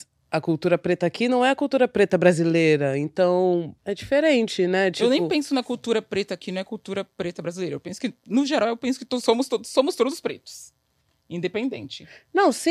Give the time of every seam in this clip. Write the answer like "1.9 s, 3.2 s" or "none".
3.8 s